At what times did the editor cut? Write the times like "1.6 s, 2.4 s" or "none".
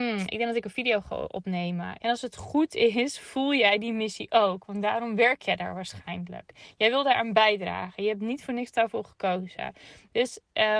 2.0 s